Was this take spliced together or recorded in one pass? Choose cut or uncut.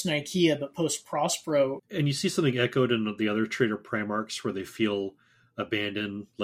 cut